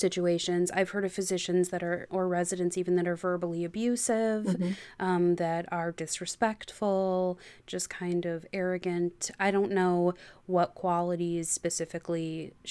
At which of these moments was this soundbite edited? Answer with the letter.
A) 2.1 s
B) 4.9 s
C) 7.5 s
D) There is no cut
A